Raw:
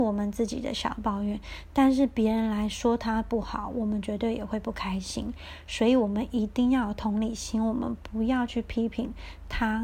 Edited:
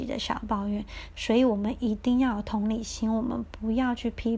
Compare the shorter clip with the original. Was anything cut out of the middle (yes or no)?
yes